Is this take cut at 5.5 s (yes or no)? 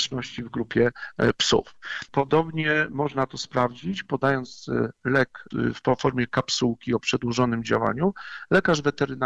yes